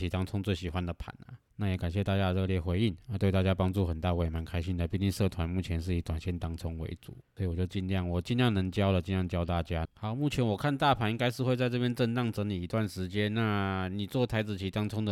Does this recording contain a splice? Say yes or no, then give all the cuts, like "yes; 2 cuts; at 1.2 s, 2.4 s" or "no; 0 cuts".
yes; 3 cuts; at 1.5 s, 7.2 s, 9.9 s